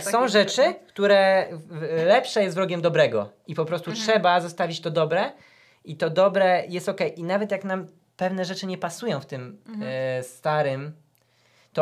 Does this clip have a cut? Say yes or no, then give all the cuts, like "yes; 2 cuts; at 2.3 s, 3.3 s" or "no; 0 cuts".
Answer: no; 0 cuts